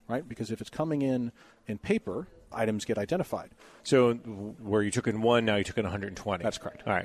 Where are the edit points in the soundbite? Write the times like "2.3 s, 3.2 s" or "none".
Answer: 2.5 s, 3.8 s